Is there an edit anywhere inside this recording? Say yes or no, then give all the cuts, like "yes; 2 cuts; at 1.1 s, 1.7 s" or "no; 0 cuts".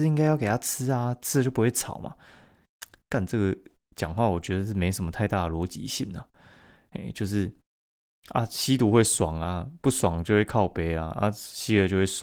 no; 0 cuts